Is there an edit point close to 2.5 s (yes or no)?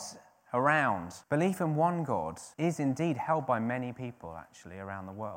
yes